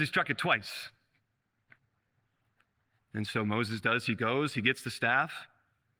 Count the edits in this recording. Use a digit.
1